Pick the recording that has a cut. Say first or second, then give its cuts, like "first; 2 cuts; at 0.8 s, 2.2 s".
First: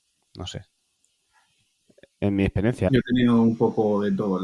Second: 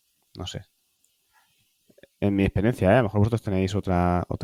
first; 1 cut; at 2.9 s